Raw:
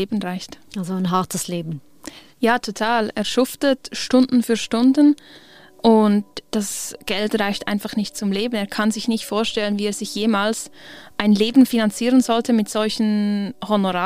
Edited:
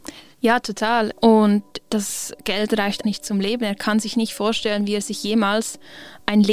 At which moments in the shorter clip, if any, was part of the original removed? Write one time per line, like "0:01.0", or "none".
0:01.1
0:03.0